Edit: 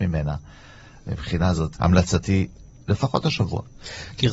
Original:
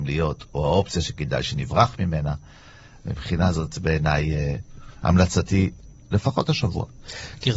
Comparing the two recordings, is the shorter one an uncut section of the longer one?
no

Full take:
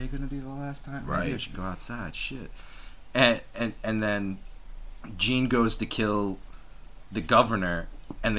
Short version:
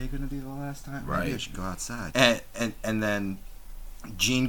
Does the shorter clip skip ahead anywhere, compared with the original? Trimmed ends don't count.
yes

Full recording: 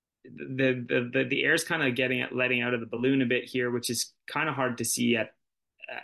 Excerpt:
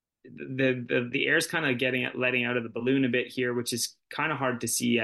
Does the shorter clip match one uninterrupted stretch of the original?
no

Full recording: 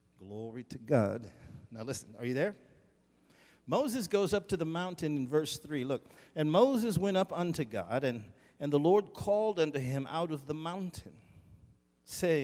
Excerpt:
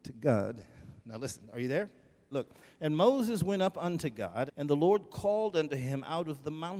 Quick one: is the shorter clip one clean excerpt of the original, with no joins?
no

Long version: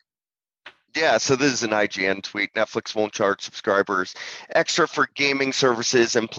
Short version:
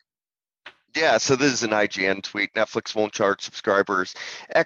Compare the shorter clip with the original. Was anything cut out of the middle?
no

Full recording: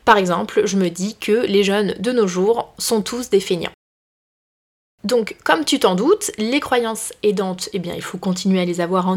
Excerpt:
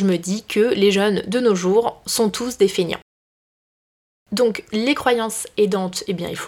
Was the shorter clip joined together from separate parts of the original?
yes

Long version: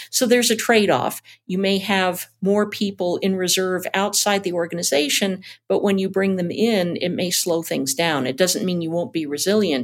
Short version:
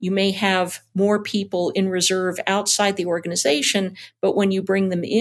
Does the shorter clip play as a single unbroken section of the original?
yes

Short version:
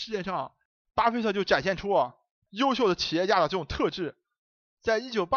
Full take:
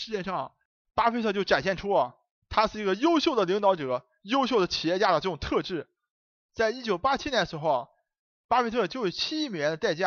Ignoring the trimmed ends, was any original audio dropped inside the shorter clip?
yes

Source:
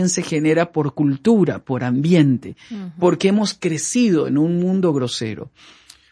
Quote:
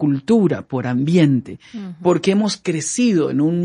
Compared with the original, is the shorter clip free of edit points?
yes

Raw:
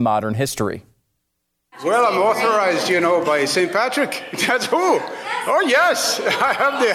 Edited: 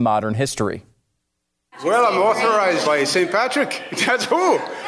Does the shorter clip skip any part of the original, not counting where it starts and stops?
yes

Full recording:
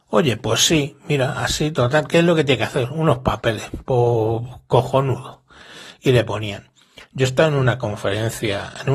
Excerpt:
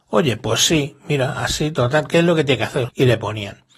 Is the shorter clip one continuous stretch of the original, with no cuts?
no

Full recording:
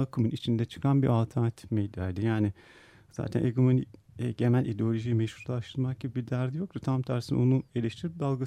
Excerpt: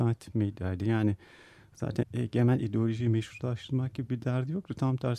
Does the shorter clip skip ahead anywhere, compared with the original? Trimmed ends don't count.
yes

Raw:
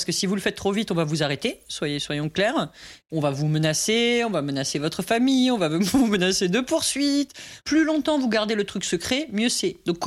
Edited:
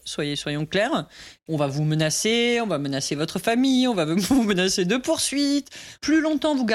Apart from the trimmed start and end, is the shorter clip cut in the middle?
no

